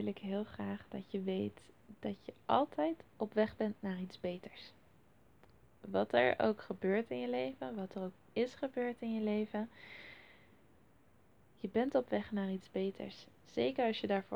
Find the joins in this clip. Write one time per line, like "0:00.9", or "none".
none